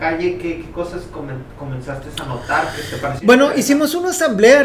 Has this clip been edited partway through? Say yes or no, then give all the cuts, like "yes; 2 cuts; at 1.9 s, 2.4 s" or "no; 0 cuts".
no; 0 cuts